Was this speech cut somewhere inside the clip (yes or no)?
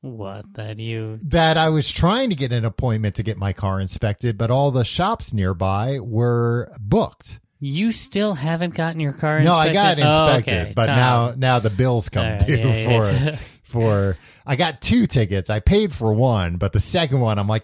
no